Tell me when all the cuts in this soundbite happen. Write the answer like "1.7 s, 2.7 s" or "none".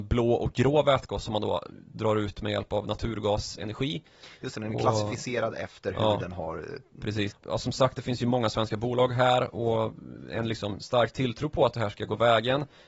7.3 s